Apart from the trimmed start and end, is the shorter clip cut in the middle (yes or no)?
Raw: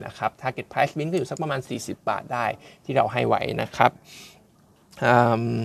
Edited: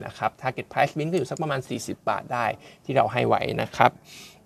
no